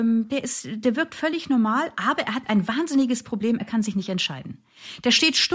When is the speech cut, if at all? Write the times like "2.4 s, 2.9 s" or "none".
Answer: none